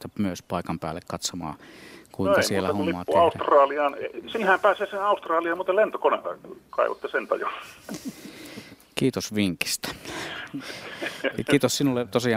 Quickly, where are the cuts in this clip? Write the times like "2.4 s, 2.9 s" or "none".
none